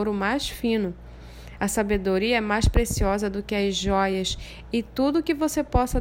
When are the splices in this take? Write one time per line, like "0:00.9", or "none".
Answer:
none